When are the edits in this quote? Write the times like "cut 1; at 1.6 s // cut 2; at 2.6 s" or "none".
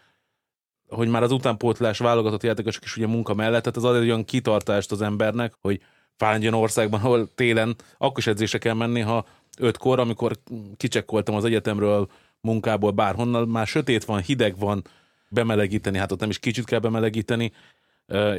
cut 1; at 5.5 s // cut 2; at 15.3 s